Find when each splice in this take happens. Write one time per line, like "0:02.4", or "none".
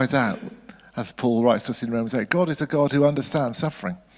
none